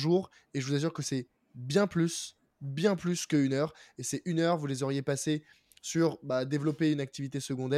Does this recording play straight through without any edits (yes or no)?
yes